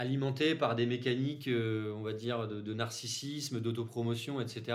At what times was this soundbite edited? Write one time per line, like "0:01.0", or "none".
none